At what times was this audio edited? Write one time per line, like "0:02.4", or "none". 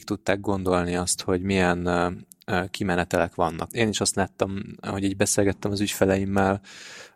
0:03.7